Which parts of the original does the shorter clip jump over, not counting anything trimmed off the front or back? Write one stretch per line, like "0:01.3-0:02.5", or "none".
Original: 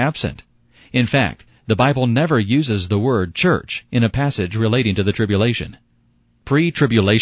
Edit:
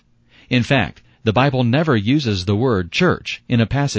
none